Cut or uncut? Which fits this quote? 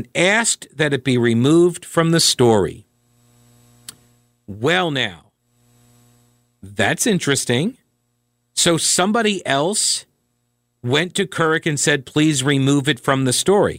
uncut